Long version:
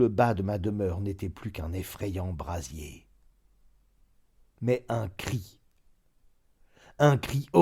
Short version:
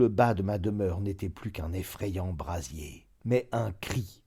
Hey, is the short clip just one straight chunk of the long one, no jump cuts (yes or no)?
no